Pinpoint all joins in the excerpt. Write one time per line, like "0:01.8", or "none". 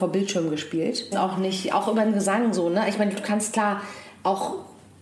0:01.1